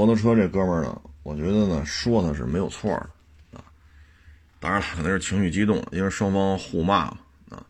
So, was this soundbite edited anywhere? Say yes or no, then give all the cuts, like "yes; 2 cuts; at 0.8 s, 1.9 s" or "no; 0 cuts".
yes; 1 cut; at 4.9 s